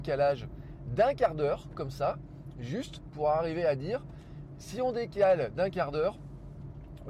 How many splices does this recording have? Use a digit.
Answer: 0